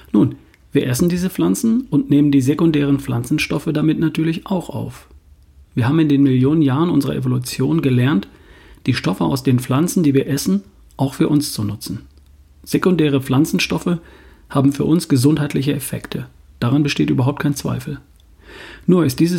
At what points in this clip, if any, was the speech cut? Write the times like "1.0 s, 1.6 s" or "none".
none